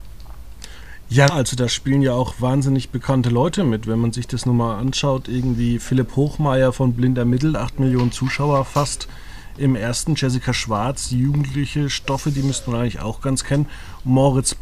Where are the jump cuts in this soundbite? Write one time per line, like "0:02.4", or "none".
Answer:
0:01.3